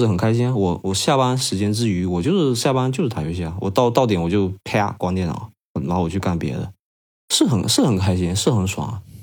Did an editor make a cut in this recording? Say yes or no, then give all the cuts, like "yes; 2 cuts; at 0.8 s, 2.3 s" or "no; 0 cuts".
no; 0 cuts